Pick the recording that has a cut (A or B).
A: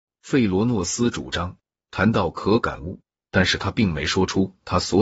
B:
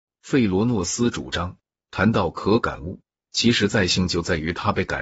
A